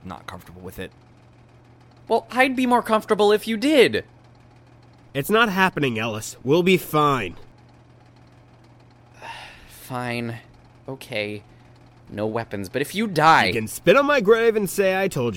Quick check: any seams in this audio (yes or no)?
no